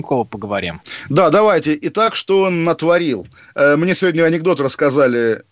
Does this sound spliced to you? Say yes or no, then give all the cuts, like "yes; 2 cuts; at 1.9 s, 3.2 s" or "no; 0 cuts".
no; 0 cuts